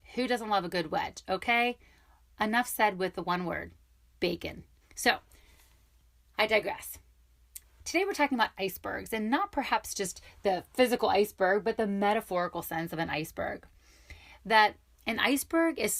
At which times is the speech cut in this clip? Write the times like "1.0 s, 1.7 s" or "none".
4.8 s